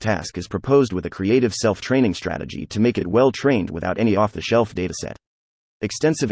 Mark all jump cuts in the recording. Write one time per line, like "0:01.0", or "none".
none